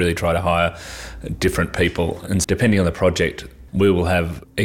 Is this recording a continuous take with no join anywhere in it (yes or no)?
no